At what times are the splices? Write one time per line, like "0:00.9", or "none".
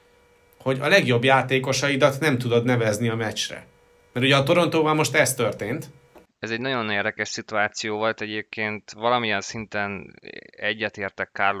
none